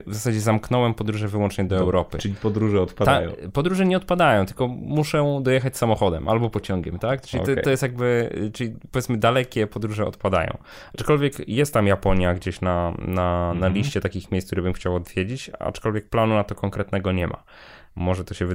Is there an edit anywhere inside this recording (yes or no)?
no